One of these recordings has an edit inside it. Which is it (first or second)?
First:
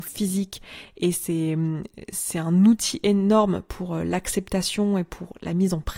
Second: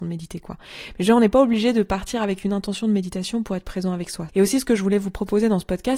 second